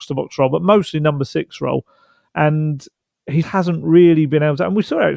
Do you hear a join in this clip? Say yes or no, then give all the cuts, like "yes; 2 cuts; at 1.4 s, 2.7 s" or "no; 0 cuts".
yes; 2 cuts; at 2.3 s, 3.4 s